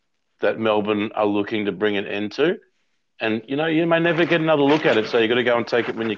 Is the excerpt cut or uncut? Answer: uncut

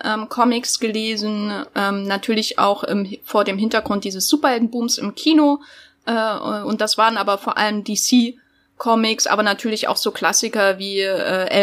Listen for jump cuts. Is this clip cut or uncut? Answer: uncut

